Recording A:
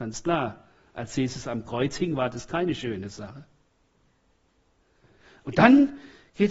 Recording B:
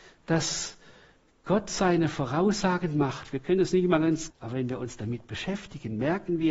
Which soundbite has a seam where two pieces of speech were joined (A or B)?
B